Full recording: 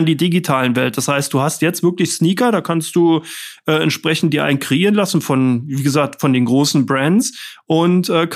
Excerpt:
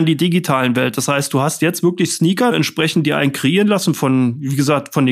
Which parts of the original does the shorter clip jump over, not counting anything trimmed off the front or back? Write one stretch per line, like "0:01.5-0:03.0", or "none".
0:02.5-0:03.8